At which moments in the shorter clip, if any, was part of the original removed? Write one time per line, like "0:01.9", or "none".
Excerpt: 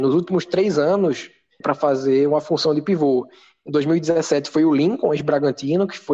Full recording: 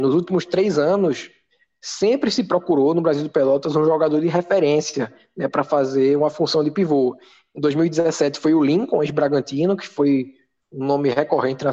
0:01.6